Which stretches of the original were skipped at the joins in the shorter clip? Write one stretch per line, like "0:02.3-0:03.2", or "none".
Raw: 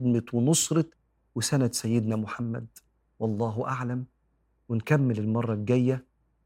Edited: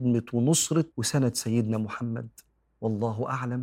0:00.9-0:01.3